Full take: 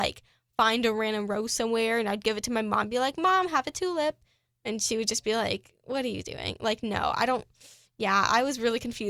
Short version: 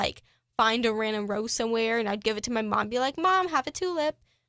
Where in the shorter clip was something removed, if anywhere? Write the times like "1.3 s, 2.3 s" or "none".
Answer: none